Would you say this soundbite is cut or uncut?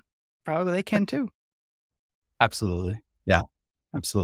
uncut